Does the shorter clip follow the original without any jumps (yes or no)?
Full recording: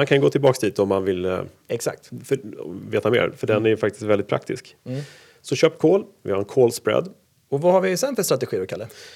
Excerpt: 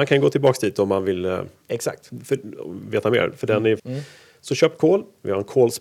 no